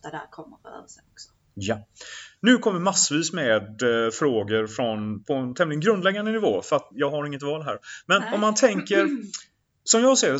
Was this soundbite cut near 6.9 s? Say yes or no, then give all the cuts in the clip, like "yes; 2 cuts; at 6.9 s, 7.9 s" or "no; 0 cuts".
yes; 1 cut; at 6.9 s